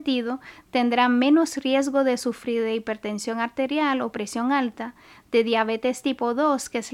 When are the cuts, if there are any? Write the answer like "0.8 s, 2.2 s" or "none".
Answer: none